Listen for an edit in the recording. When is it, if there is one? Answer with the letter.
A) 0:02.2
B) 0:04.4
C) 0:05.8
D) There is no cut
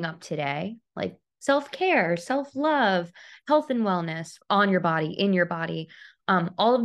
B